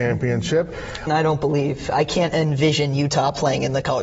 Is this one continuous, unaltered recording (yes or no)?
no